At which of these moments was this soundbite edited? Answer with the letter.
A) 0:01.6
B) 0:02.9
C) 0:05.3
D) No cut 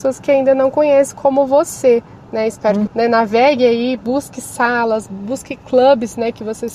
B